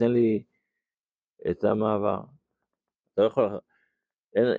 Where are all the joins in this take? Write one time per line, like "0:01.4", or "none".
0:03.0